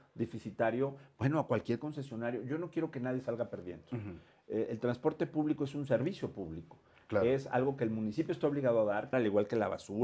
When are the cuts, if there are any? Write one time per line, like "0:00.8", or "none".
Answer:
0:09.1

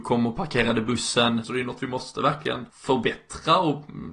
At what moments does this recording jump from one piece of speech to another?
0:01.4
0:02.7

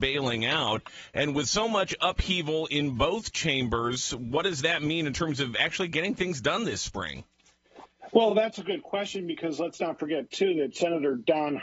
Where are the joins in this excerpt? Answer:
none

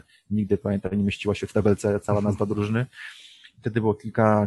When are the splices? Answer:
none

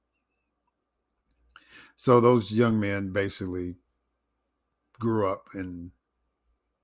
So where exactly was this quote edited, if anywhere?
none

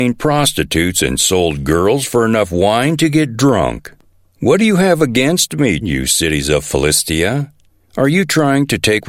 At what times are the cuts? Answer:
0:05.8

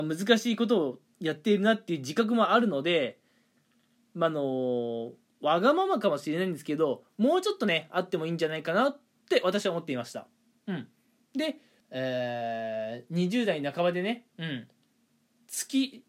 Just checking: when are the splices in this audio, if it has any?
0:11.8

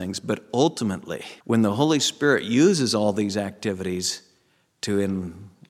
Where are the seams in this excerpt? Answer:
0:01.4

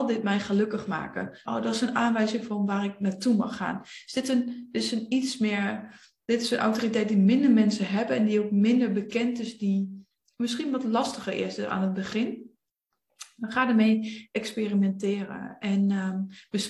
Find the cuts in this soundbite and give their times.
0:01.5

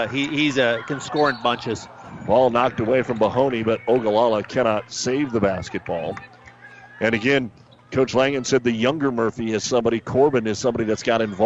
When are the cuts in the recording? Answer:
none

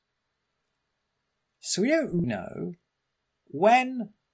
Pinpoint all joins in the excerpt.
0:02.2

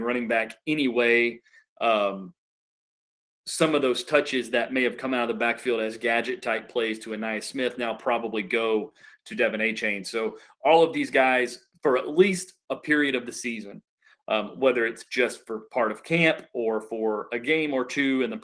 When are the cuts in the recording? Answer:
none

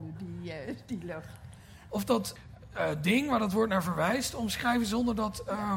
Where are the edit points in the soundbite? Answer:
0:01.9

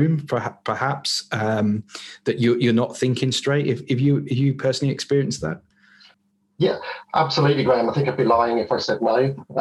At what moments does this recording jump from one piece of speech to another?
none

